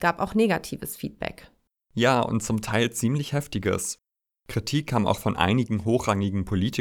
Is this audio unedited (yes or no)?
yes